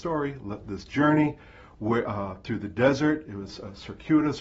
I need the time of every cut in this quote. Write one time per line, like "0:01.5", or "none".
none